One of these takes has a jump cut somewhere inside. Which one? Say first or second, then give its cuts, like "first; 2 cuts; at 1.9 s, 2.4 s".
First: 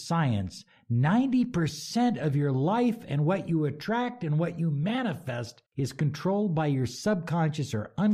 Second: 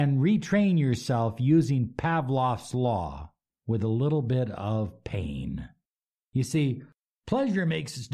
first; 1 cut; at 5.7 s